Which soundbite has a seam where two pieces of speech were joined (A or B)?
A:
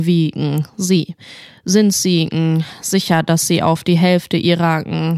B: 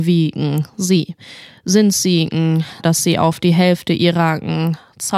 B